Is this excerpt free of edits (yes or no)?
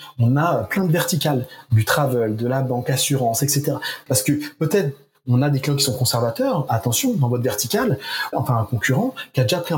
no